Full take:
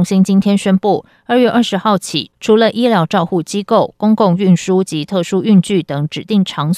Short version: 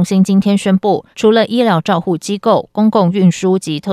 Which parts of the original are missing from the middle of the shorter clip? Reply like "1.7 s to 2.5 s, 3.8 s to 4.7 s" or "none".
1.1 s to 2.4 s